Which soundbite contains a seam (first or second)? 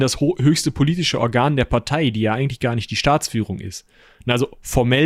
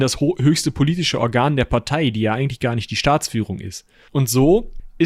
second